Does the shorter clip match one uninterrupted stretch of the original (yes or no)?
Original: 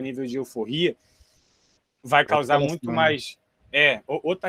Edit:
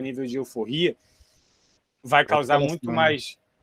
yes